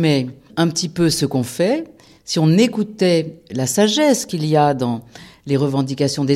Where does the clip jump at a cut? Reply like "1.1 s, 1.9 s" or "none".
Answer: none